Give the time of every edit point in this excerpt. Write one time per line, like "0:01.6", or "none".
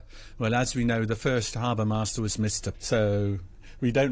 0:02.7